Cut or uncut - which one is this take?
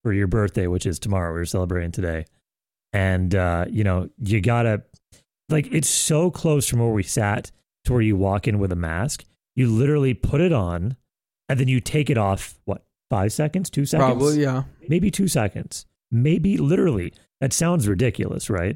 uncut